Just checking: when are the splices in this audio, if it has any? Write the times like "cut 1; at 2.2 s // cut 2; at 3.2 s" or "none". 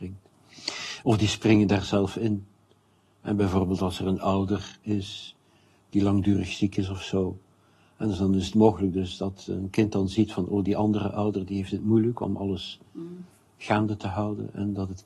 cut 1; at 1.0 s